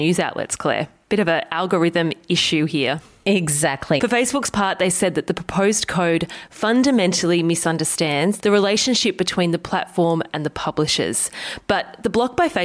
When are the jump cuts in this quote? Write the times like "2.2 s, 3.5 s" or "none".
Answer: 4.0 s, 8.4 s

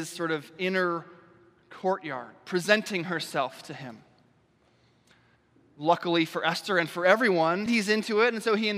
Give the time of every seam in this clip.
7.7 s

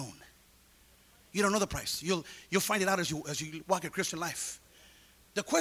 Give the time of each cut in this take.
none

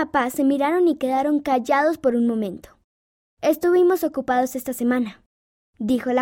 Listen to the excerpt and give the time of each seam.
none

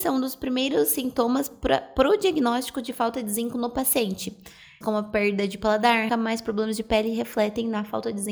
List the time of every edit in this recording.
4.8 s, 6.1 s

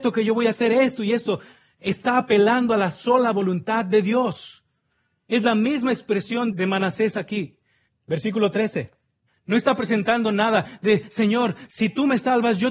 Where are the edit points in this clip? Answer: 6.5 s, 7.9 s, 9.3 s

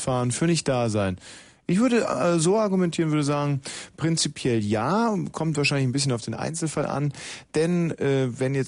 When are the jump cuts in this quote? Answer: none

